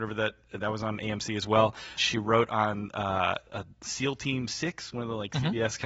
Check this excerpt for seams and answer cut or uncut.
cut